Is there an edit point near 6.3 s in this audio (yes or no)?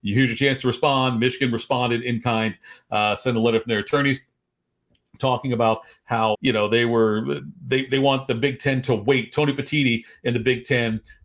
yes